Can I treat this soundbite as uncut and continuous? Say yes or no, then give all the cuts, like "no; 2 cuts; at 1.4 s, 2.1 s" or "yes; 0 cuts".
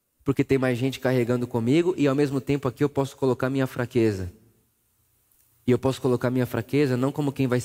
yes; 0 cuts